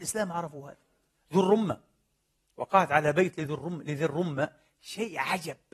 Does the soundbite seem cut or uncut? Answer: uncut